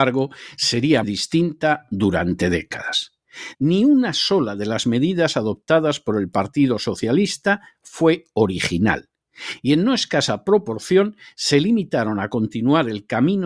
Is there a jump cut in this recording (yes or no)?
yes